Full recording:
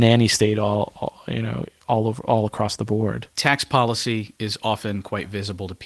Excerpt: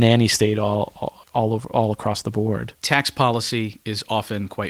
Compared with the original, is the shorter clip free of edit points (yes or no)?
no